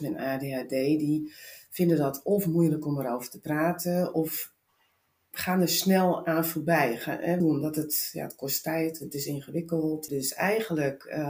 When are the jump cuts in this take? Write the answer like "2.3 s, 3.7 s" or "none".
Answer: 7.4 s, 10.1 s